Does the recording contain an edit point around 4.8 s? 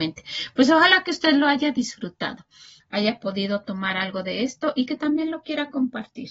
no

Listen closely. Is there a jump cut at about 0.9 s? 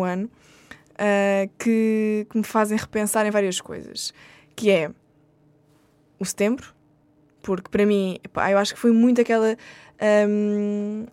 no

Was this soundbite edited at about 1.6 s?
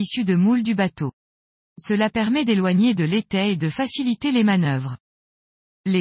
yes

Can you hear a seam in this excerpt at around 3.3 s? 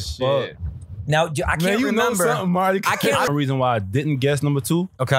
yes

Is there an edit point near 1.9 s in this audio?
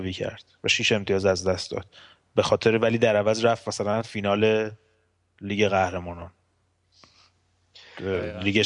no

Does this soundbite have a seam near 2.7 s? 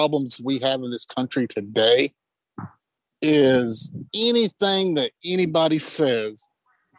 no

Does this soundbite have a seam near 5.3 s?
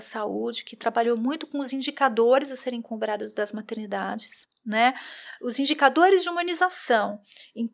no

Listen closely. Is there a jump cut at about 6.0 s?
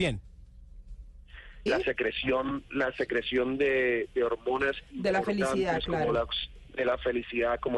no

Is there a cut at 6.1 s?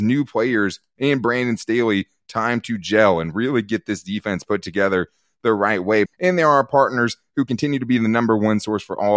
yes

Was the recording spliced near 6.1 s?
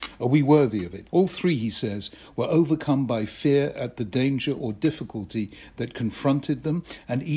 no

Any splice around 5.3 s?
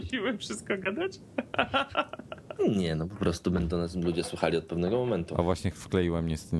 no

